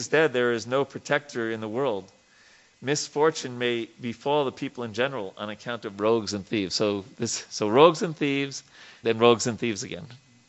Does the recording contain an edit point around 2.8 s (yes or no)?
no